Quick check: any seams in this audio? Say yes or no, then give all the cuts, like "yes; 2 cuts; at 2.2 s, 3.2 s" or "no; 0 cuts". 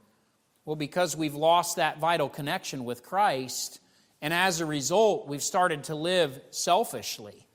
no; 0 cuts